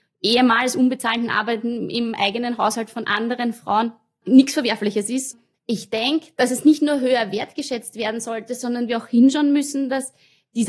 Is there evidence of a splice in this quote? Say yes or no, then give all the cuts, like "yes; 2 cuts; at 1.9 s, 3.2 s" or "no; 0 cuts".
no; 0 cuts